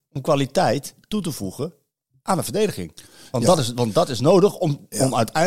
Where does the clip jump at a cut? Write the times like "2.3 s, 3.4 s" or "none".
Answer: none